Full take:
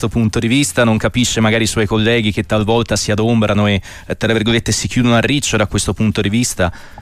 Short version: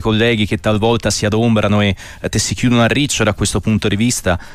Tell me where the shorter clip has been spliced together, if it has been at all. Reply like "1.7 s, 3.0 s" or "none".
2.3 s